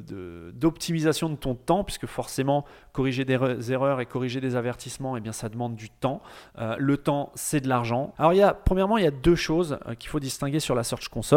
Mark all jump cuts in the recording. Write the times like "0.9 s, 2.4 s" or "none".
8.2 s